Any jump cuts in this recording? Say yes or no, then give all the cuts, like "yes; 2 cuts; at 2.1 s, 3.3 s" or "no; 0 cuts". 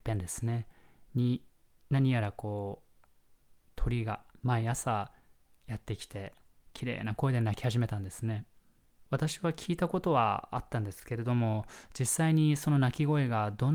yes; 2 cuts; at 4.4 s, 9.1 s